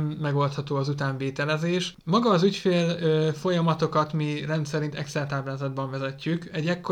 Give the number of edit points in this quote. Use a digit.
1